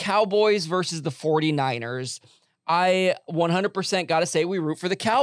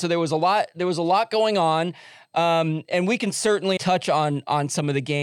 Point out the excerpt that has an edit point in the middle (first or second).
second